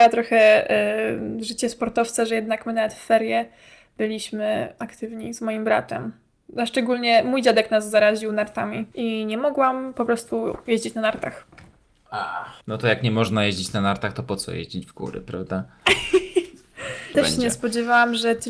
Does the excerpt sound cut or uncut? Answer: cut